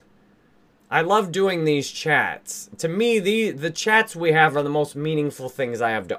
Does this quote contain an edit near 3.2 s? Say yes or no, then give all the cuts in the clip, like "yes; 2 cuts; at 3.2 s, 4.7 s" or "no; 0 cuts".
no; 0 cuts